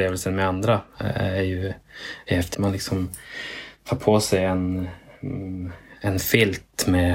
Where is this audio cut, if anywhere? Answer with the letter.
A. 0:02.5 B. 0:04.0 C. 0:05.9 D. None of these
A